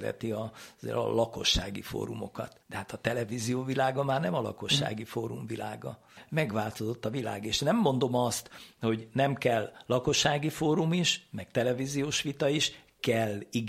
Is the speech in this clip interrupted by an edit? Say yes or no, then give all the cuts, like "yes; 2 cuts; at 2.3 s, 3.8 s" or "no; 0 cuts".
yes; 1 cut; at 2.6 s